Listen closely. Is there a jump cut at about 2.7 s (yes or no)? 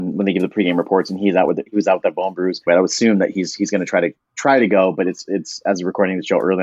yes